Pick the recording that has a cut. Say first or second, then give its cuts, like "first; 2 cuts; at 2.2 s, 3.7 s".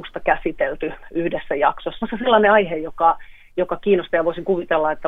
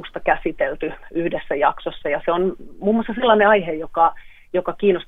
first; 1 cut; at 2.0 s